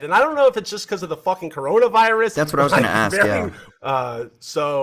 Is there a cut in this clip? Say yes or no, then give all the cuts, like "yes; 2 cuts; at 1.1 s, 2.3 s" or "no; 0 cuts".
yes; 2 cuts; at 2.3 s, 3.7 s